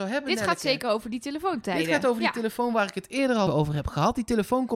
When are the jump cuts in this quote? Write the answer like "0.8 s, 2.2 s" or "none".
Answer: 3.5 s